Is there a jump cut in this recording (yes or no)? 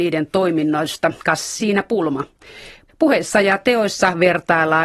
yes